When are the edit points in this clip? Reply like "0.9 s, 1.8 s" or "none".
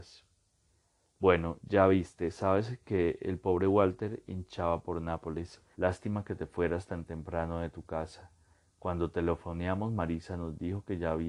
5.7 s